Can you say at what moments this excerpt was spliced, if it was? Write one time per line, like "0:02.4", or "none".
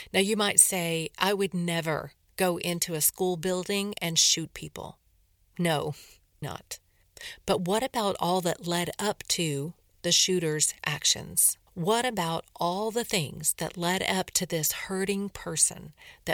0:06.4
0:11.7